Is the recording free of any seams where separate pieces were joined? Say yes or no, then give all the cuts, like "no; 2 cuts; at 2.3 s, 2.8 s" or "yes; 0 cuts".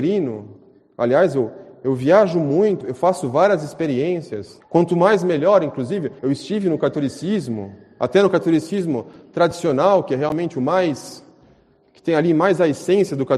no; 3 cuts; at 2.8 s, 4.6 s, 6.2 s